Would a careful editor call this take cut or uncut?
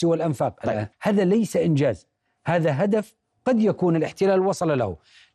cut